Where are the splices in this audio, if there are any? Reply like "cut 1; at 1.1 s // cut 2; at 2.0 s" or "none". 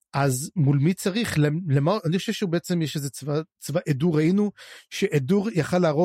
none